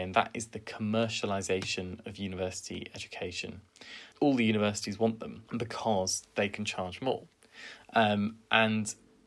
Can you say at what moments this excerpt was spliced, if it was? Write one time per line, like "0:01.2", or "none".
0:04.1
0:05.5